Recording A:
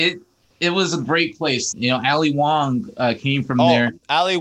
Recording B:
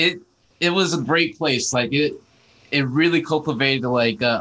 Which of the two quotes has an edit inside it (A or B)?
A